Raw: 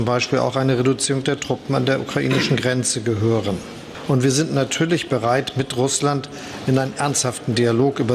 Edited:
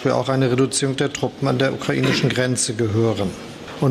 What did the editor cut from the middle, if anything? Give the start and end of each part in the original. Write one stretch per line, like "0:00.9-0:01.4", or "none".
none